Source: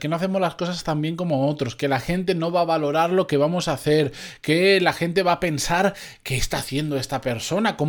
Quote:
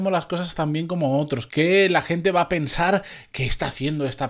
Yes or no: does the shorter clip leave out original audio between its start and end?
yes